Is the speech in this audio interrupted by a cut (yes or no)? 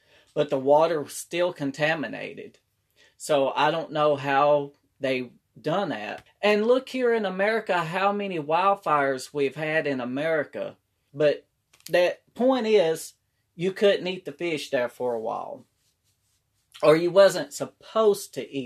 yes